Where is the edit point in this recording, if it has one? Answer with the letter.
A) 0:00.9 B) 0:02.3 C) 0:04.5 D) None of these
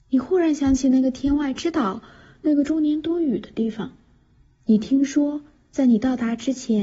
D